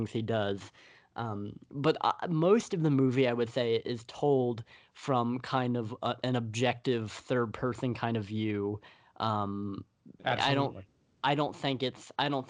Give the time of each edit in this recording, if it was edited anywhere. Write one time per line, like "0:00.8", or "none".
none